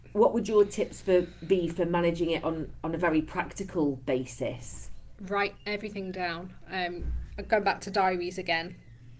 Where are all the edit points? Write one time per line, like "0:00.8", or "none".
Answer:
none